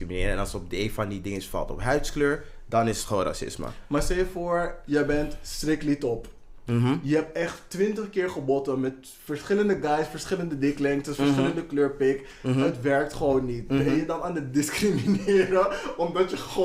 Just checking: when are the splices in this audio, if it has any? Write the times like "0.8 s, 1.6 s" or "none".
none